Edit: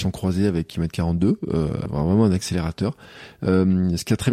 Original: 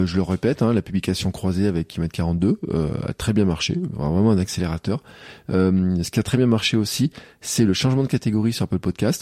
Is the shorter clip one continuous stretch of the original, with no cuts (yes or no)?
no